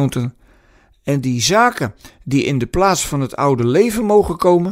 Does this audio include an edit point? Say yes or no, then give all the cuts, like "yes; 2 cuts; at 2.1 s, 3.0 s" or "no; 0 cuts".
no; 0 cuts